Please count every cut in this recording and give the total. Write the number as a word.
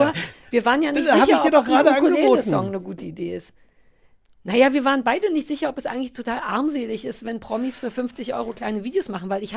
zero